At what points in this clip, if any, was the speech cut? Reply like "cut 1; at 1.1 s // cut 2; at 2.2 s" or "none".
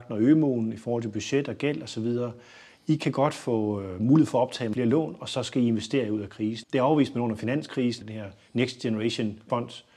cut 1; at 6.6 s // cut 2; at 8.0 s